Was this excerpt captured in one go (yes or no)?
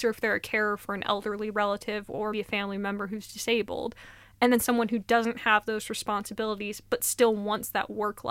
no